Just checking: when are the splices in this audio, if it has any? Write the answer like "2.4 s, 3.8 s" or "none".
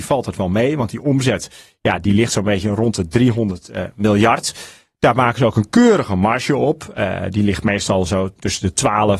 none